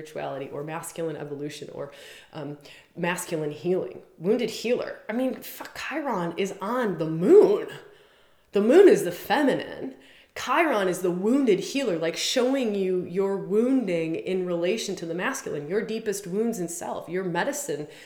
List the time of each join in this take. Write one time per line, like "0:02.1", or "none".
none